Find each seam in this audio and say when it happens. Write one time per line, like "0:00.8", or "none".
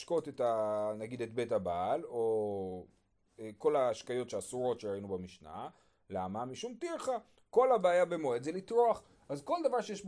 none